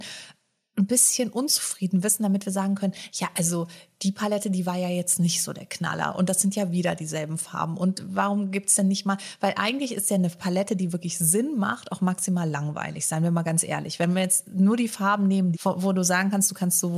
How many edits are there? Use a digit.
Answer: 1